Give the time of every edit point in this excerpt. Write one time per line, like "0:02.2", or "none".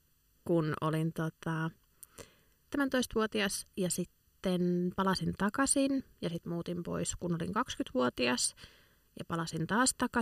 0:02.7